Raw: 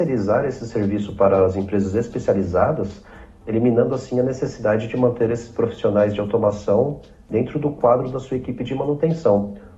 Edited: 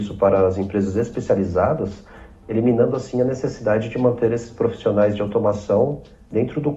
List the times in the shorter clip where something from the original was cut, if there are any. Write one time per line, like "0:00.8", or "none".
none